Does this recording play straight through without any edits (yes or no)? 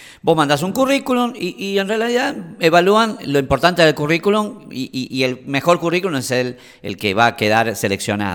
yes